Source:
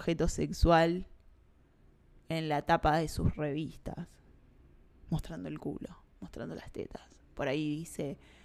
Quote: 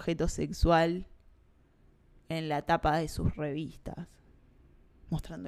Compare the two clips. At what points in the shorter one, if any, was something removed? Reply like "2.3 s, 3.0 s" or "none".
none